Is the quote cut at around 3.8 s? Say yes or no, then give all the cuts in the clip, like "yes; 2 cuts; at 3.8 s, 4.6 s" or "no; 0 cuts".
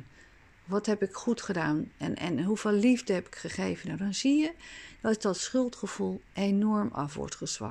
no; 0 cuts